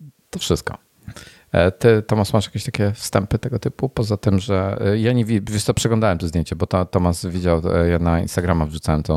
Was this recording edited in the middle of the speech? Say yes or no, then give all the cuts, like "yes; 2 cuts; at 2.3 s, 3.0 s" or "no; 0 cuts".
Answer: no; 0 cuts